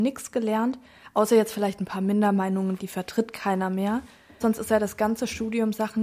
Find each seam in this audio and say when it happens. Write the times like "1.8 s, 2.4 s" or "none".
2.8 s, 4.4 s